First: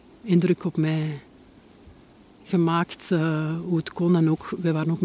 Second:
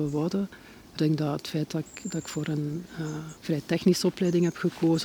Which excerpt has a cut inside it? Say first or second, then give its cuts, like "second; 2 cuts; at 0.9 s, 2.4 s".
second; 2 cuts; at 1.0 s, 3.4 s